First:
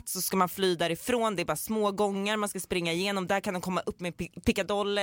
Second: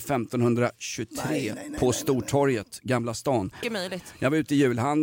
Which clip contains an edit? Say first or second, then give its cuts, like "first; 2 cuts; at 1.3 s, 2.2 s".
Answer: second; 2 cuts; at 1.5 s, 3.6 s